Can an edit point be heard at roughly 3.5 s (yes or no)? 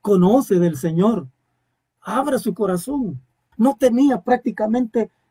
yes